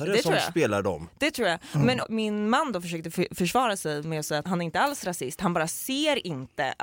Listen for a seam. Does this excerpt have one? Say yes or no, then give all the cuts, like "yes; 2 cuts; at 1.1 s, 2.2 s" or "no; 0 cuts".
yes; 2 cuts; at 2.0 s, 4.4 s